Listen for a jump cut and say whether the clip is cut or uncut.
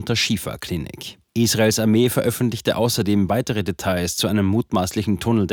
cut